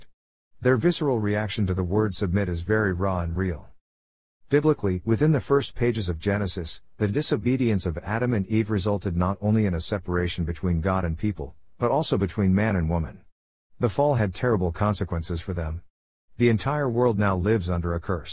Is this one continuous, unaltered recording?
yes; 0 cuts

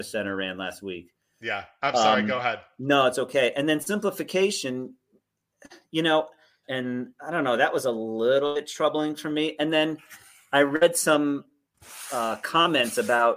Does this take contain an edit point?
yes; 1 cut; at 6.6 s

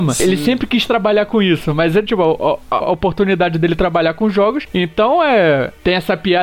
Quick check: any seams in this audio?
yes; 2 cuts; at 2.8 s, 4.7 s

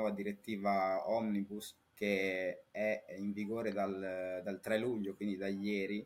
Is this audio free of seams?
no; 1 cut; at 1.9 s

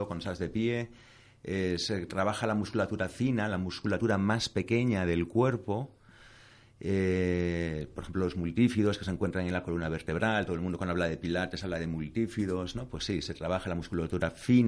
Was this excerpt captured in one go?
yes; 0 cuts

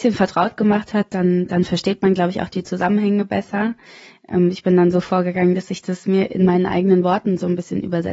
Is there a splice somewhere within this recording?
no; 0 cuts

